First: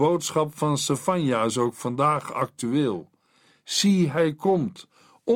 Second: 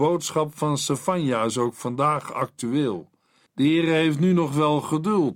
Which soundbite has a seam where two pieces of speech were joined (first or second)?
second